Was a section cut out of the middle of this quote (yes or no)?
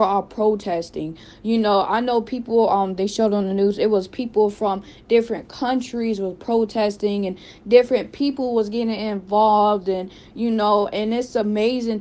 no